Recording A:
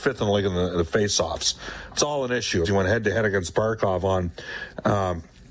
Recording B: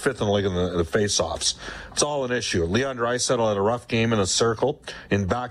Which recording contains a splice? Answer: A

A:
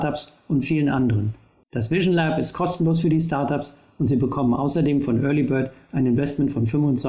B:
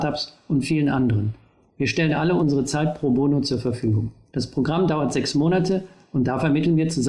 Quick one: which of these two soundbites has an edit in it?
A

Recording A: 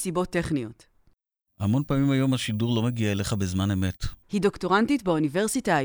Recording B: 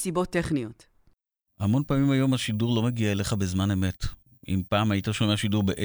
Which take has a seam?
A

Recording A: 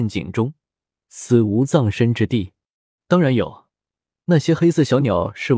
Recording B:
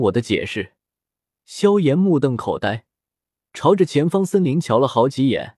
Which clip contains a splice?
A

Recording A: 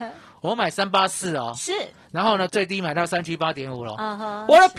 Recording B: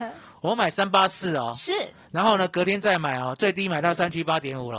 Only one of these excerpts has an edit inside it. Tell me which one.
A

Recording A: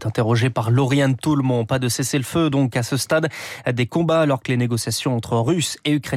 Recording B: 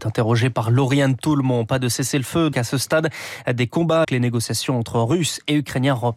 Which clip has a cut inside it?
B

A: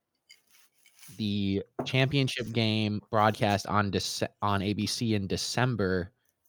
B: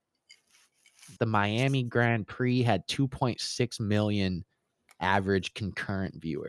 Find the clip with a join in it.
B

